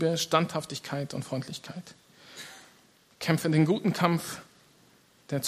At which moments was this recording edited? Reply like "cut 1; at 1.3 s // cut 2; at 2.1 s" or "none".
none